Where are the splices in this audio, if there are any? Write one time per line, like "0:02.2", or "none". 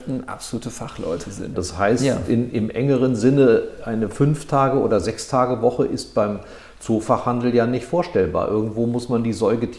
0:01.5